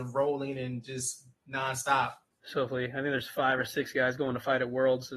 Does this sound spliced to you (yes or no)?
yes